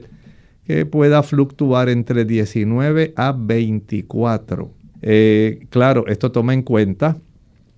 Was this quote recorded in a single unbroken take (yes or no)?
no